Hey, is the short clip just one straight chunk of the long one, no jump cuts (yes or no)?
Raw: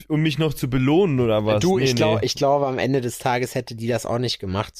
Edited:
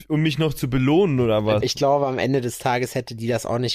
no